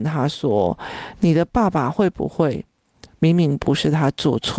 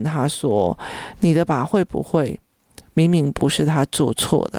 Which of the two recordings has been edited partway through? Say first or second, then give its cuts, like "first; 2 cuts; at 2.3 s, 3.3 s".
second; 1 cut; at 1.5 s